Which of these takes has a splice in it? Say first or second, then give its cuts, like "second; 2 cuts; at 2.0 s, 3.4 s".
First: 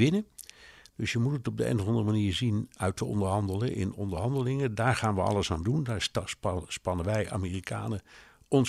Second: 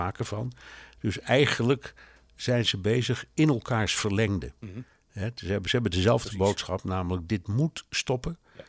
first; 1 cut; at 2.8 s